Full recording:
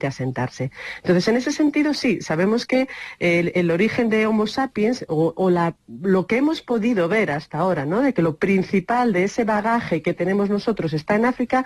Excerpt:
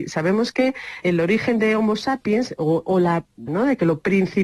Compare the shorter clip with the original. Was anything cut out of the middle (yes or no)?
yes